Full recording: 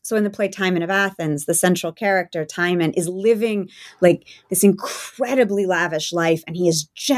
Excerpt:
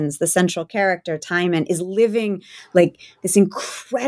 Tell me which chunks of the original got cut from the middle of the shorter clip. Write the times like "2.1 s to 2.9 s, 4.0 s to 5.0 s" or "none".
none

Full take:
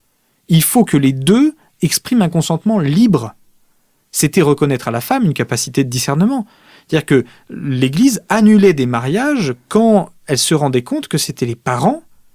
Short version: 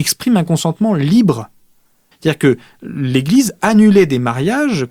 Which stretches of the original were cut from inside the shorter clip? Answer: 4.0 s to 6.8 s

